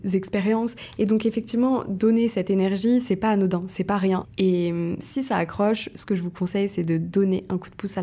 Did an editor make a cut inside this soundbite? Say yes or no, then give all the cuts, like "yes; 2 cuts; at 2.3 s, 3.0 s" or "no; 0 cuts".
yes; 1 cut; at 4.2 s